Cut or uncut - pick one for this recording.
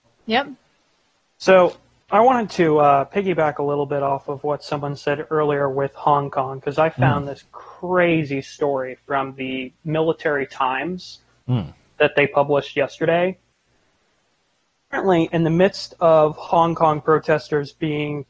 uncut